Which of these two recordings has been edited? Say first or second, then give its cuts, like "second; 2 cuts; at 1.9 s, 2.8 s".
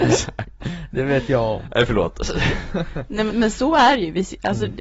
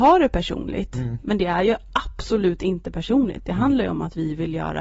first; 1 cut; at 3.3 s